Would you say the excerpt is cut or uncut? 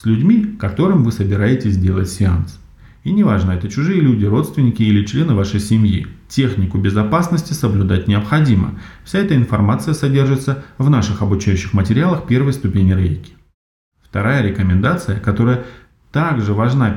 uncut